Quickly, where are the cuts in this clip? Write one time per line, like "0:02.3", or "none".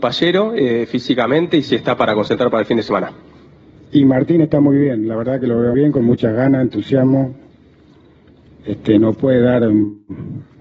0:05.7

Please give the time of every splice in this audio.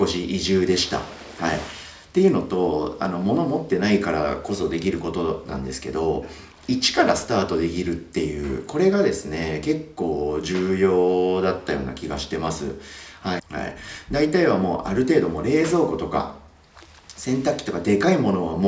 0:13.4

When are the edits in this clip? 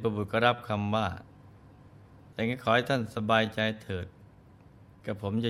none

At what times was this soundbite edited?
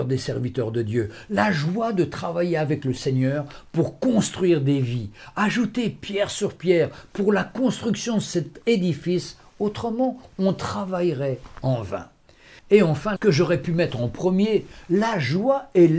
0:13.2

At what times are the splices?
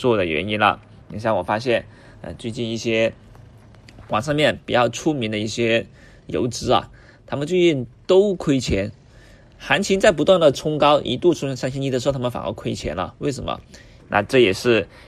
0:14.0

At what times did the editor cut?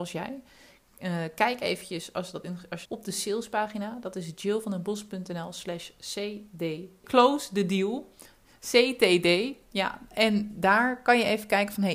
0:02.9
0:07.0

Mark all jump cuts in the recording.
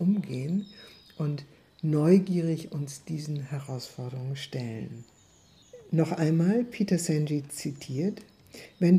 none

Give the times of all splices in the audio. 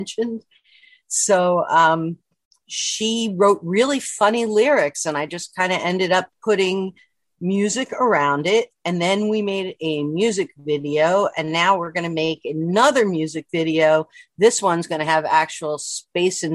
none

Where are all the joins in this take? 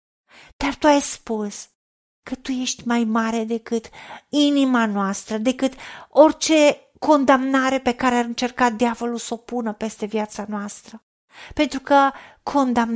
none

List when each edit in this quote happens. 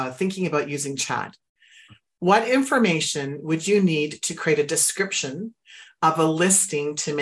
none

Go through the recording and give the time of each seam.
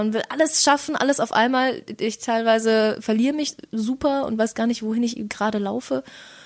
none

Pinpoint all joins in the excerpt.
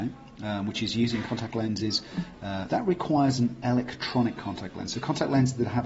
0:02.7

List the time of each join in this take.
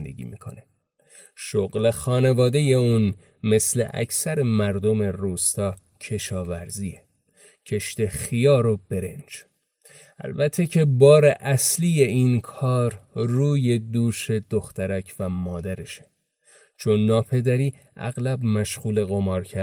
none

